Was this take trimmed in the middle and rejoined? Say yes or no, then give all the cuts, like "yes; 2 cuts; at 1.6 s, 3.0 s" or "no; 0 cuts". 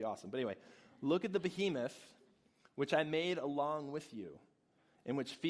no; 0 cuts